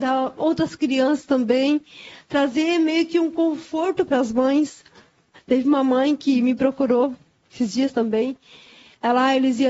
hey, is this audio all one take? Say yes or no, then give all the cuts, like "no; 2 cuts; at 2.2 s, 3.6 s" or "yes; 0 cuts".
yes; 0 cuts